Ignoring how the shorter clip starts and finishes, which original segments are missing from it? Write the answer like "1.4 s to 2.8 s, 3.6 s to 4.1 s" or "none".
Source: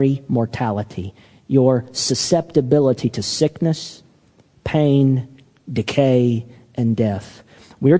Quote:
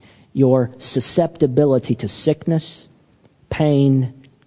none